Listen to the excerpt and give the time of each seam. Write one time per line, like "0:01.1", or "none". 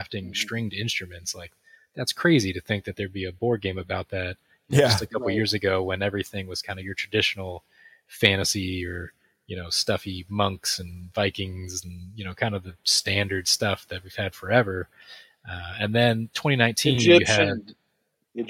none

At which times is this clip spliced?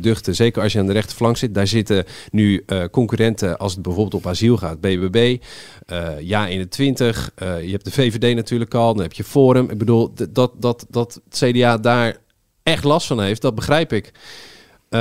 none

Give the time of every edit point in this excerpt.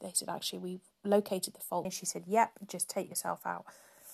0:01.8

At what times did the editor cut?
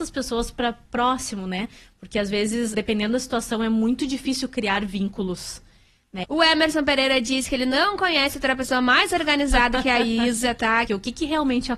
0:02.7
0:06.2
0:10.9

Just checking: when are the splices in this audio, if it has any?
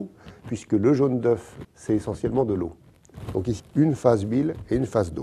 0:01.6
0:03.6

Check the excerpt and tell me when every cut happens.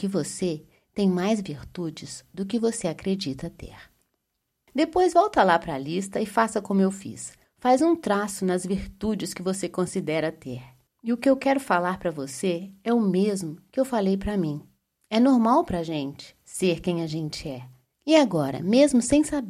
0:17.9

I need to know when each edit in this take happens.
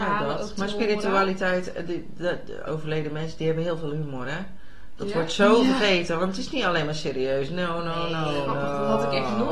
0:02.7

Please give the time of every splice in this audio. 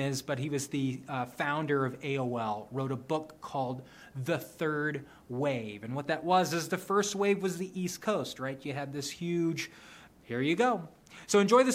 0:10.1

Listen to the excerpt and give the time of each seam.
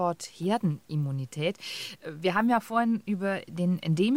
none

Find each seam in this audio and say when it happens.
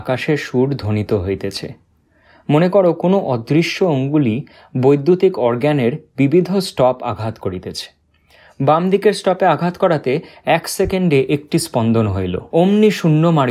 0:12.5

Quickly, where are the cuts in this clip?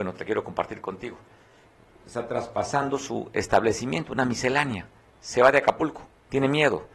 none

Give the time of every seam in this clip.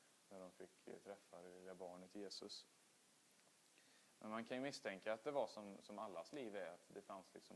none

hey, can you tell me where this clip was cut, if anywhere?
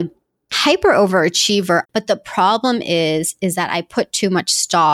0:01.8

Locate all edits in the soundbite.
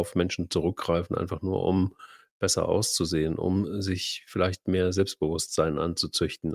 none

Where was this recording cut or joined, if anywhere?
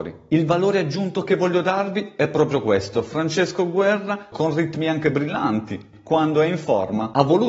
0:04.3

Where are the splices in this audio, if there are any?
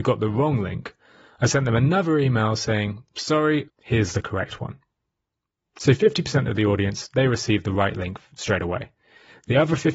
0:03.7

